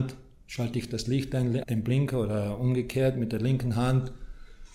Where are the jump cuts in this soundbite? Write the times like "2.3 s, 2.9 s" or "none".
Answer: 1.6 s